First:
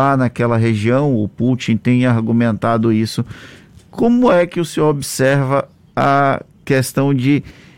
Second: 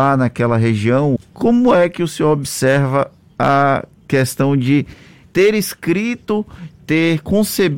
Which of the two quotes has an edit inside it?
second; 2 cuts; at 1.2 s, 5.2 s

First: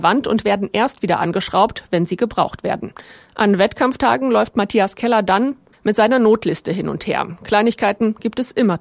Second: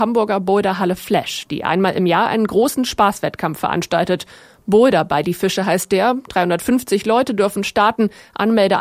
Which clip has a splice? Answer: first; 1 cut; at 5.7 s

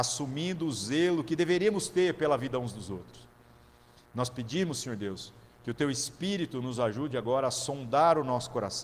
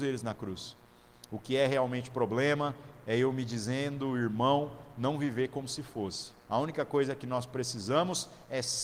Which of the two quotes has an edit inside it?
second; 1 cut; at 6.5 s

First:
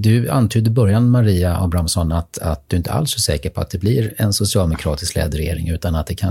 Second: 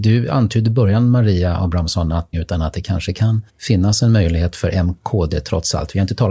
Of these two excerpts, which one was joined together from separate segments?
second; 2 cuts; at 2.3 s, 3.5 s

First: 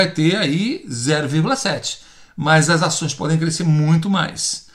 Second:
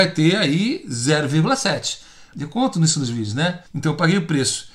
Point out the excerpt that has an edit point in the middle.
second; 2 cuts; at 2.3 s, 3.7 s

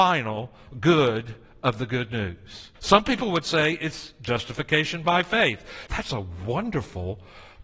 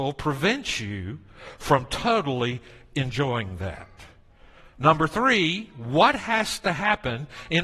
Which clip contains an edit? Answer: first; 2 cuts; at 2.8 s, 5.9 s

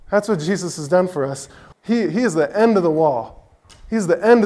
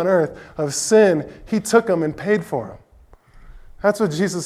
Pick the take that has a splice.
first; 1 cut; at 1.7 s

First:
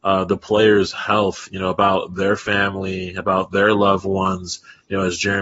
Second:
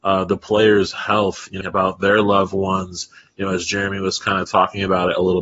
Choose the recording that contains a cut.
second; 1 cut; at 1.6 s

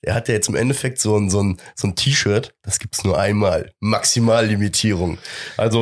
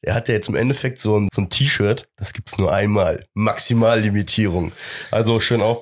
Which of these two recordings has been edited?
second; 1 cut; at 1.3 s

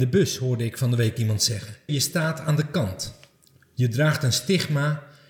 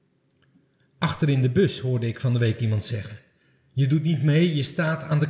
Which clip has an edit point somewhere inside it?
first; 1 cut; at 1.9 s

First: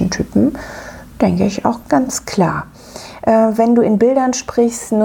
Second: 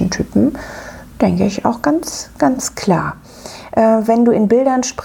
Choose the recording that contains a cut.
first; 1 cut; at 1.8 s

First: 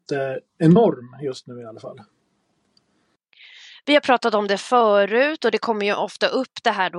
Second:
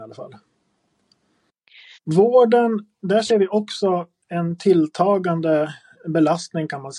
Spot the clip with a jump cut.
second; 1 cut; at 1.9 s

